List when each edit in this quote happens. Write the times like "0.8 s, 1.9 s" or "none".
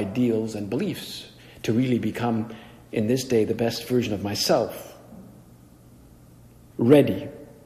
6.7 s